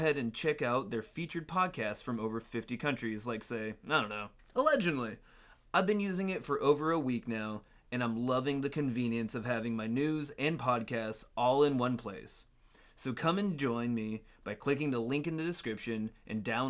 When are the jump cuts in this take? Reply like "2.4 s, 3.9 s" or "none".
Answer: none